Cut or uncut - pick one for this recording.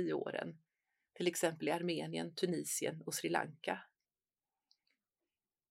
uncut